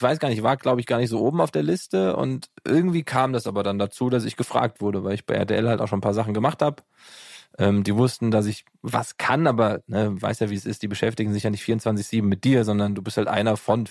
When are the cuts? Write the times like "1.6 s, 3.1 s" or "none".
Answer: none